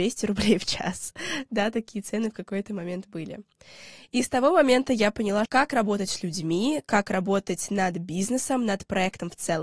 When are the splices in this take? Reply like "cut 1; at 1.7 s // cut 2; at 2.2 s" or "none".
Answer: cut 1; at 5.5 s